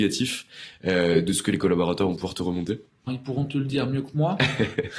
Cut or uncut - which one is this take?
cut